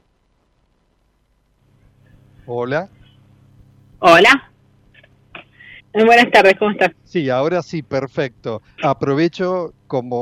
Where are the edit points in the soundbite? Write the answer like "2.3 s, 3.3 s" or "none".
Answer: 5.8 s, 6.9 s, 8.8 s